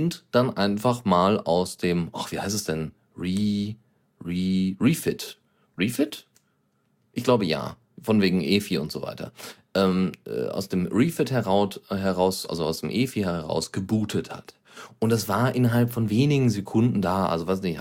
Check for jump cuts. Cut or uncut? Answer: uncut